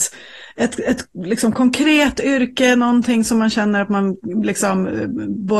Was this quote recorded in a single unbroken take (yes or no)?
yes